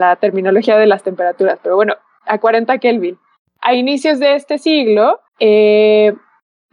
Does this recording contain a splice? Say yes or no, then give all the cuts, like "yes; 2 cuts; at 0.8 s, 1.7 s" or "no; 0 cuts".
yes; 2 cuts; at 3.5 s, 5.3 s